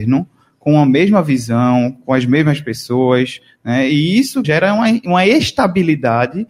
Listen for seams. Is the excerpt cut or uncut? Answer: cut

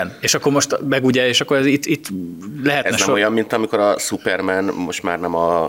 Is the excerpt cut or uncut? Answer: uncut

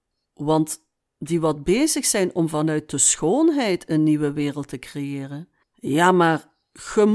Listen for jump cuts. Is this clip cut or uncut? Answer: cut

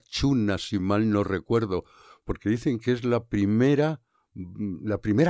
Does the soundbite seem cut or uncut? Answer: uncut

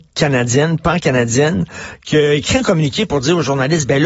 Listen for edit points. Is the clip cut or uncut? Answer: uncut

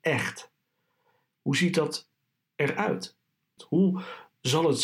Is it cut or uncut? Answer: cut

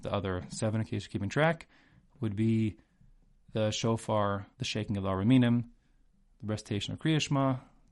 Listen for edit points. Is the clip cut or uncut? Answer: cut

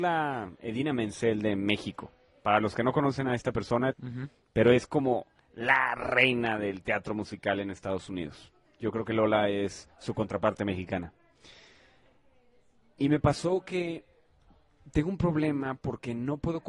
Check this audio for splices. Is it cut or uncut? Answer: cut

